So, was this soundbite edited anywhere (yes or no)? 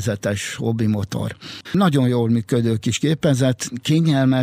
yes